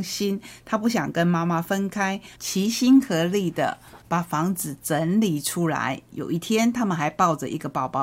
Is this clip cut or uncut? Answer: cut